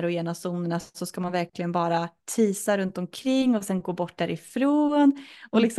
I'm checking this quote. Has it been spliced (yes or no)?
no